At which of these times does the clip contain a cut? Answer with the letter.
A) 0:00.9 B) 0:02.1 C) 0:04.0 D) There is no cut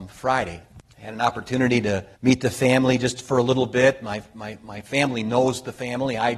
B